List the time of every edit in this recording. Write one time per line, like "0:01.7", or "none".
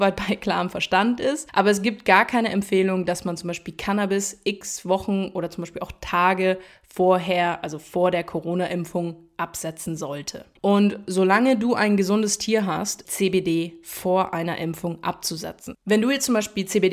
0:10.6
0:13.0